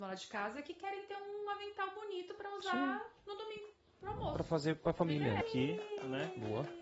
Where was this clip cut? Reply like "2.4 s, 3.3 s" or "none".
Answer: 5.4 s